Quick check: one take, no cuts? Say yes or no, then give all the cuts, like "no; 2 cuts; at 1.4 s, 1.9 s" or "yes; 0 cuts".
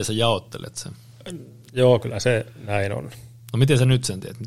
no; 1 cut; at 1.7 s